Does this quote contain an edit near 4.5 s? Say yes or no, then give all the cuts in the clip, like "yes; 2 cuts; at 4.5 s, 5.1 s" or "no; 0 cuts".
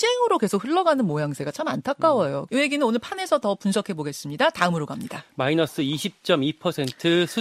no; 1 cut; at 2.5 s